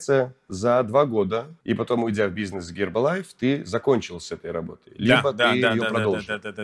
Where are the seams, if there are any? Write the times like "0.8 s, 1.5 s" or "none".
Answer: 1.6 s